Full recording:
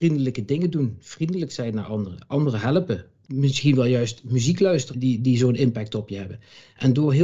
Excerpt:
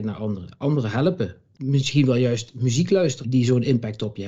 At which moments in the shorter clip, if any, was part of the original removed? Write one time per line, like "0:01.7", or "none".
0:03.2